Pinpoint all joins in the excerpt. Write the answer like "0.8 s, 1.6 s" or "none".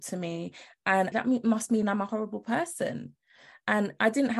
1.1 s